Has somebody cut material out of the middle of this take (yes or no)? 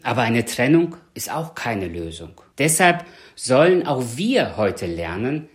yes